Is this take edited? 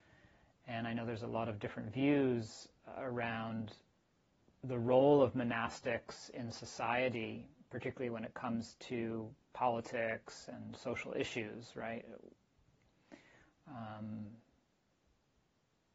yes; 1 cut; at 9.4 s

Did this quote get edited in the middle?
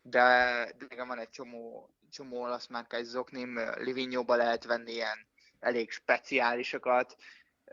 yes; 1 cut; at 5.6 s

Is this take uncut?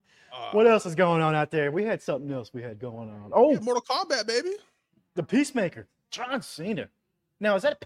yes; 0 cuts

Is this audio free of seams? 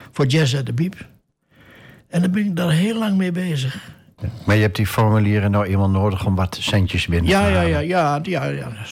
no; 1 cut; at 4.2 s

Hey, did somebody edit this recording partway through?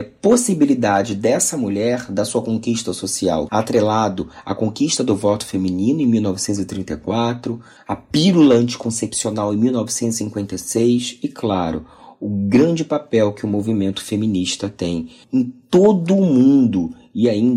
yes; 1 cut; at 3.5 s

